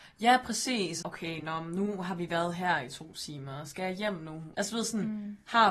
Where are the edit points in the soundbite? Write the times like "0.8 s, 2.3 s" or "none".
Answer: 1.0 s, 4.5 s